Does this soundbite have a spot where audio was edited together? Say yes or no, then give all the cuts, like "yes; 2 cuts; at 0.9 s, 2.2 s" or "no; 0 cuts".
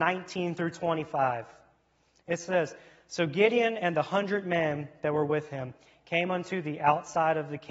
no; 0 cuts